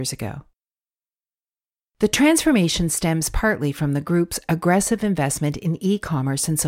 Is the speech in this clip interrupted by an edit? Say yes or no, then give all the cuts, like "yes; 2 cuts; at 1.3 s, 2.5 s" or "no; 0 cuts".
no; 0 cuts